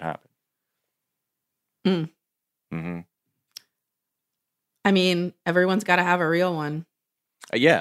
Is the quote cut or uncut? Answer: uncut